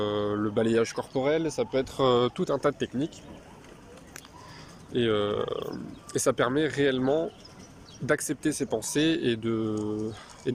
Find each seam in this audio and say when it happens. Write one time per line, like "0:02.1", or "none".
none